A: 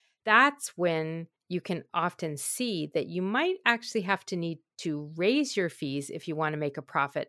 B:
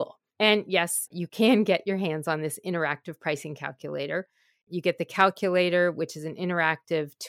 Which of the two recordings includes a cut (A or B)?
B